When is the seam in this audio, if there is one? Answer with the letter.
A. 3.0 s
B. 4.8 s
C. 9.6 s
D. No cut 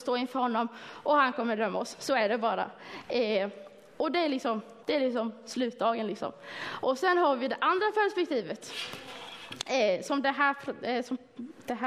B